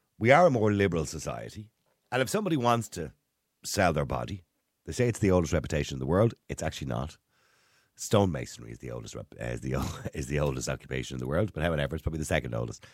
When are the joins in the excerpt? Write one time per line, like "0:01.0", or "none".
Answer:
none